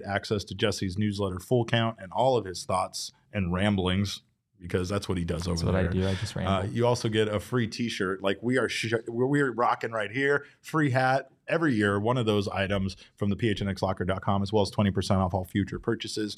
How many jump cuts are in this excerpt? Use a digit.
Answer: 0